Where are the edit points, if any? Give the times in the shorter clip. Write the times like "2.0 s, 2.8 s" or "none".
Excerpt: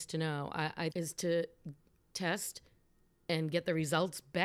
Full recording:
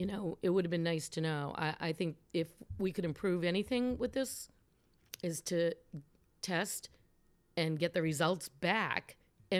0.9 s